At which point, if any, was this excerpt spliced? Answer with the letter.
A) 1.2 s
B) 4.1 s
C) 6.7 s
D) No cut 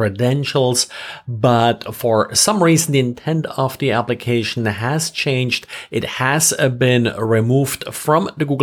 D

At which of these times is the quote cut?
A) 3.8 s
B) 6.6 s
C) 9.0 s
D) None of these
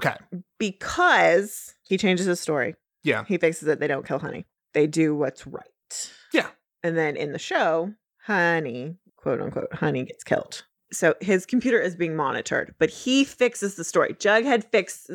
D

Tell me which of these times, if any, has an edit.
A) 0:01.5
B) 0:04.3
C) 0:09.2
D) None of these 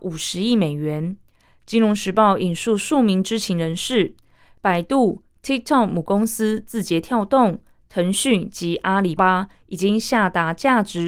C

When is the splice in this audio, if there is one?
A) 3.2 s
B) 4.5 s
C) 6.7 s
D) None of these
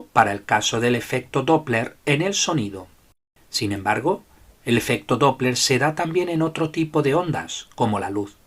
D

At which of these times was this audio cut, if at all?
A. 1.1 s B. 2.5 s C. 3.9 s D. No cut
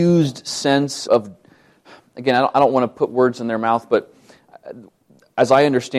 A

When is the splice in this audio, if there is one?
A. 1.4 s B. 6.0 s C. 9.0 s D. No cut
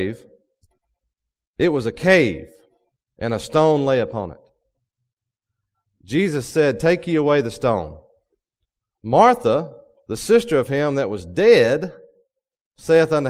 D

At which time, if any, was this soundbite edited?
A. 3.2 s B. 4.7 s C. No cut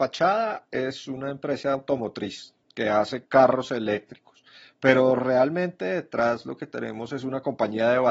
C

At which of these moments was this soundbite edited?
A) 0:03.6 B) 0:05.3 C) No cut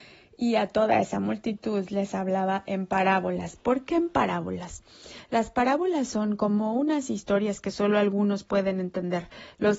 C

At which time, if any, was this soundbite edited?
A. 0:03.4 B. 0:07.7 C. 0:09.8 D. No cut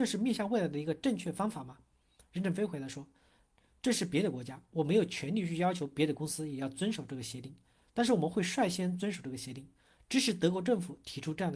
D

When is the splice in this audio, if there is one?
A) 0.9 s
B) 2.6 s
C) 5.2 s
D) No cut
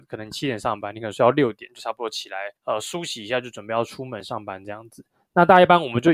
B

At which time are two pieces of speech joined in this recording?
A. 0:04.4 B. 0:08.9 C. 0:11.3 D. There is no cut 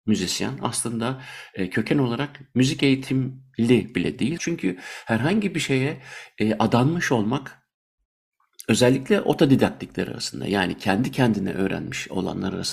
A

